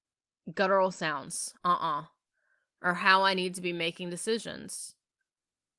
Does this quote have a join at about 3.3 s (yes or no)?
no